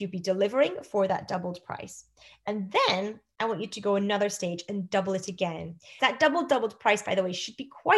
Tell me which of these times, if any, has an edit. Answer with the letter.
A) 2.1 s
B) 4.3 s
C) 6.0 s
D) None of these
C